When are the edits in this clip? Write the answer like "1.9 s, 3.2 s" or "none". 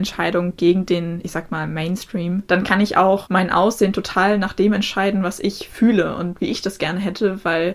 2.5 s